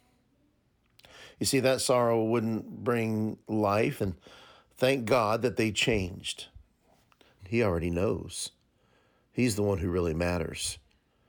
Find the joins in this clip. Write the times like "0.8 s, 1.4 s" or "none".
4.0 s, 7.4 s